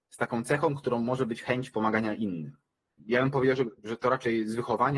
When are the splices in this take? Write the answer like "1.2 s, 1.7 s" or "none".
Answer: 2.9 s